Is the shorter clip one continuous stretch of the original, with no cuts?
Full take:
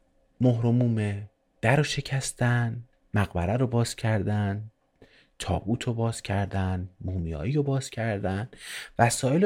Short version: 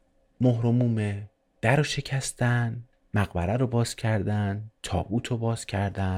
no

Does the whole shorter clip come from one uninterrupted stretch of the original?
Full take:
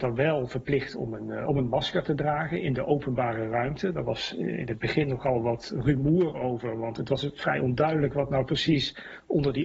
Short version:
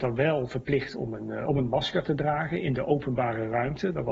yes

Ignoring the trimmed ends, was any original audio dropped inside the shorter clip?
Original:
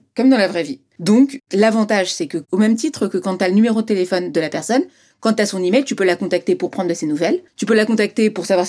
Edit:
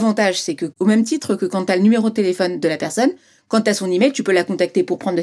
no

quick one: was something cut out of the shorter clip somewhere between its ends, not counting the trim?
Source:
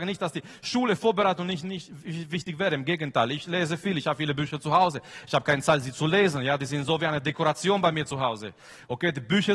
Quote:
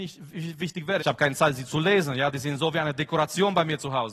yes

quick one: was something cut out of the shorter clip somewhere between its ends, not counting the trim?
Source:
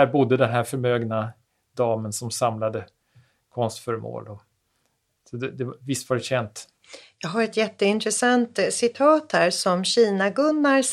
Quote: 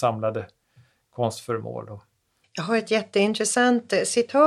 yes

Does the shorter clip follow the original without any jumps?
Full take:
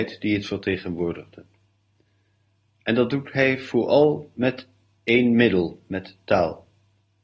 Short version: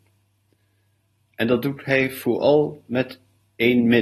yes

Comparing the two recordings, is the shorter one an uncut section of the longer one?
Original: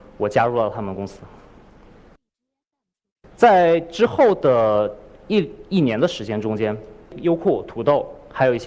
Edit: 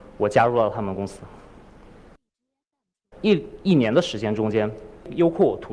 no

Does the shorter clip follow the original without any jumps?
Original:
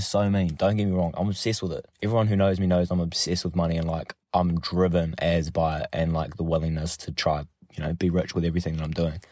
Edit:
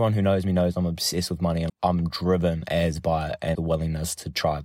no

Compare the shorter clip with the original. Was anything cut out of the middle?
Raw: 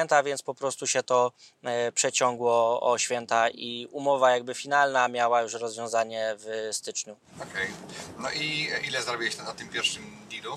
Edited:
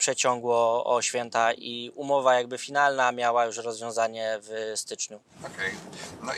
no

